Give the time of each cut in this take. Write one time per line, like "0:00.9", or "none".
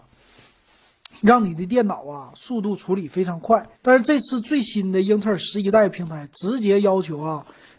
0:03.7